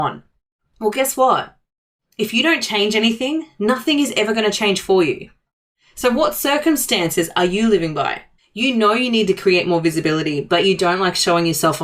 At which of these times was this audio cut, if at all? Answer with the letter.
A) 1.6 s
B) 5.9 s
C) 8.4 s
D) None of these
C